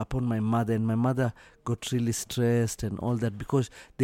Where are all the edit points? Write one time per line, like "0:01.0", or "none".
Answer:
none